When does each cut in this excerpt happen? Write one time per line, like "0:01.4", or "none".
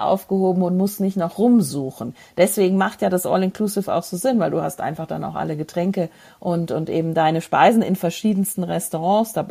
none